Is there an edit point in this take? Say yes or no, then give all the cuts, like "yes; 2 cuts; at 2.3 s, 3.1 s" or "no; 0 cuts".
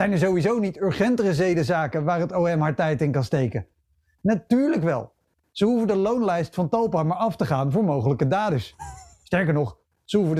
no; 0 cuts